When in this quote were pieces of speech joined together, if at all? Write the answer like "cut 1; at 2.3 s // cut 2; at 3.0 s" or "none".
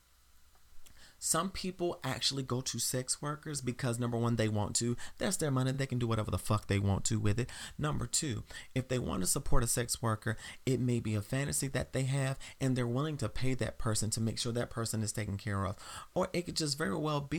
none